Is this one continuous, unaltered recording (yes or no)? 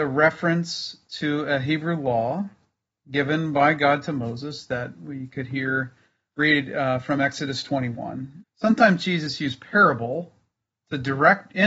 no